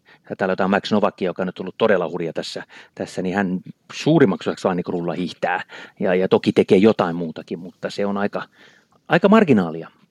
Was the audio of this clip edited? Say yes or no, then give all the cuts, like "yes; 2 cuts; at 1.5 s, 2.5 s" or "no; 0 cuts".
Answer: no; 0 cuts